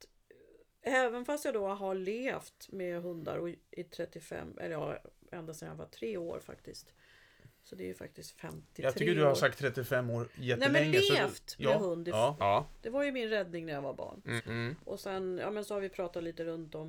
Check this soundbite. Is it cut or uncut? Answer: cut